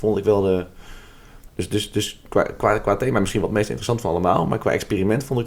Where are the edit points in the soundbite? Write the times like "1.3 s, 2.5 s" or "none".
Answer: 1.5 s